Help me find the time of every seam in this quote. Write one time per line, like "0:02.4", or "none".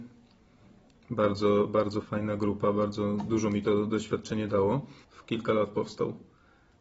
0:02.0
0:05.0

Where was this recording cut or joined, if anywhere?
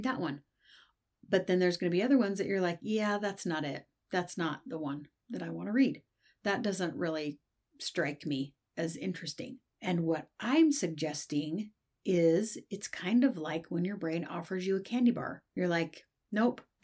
0:09.7

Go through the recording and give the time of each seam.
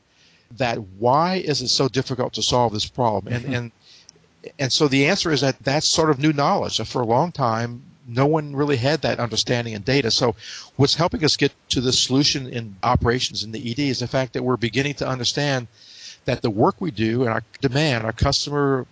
none

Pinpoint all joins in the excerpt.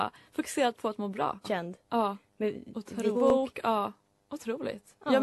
0:01.4
0:03.1

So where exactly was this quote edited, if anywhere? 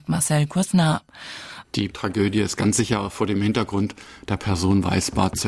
0:01.6

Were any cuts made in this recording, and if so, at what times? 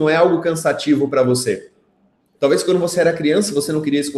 0:02.3

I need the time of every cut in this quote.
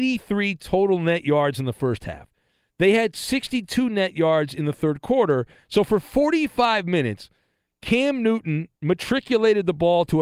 0:08.7

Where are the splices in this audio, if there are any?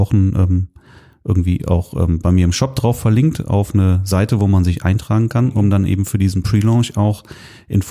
none

